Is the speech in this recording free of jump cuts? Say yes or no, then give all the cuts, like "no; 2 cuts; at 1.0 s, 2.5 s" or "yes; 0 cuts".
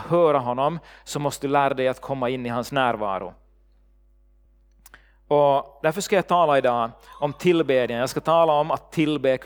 yes; 0 cuts